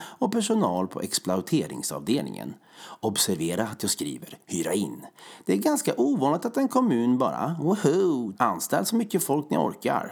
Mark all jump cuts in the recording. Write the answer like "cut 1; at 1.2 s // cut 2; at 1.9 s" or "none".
cut 1; at 5.4 s // cut 2; at 8.3 s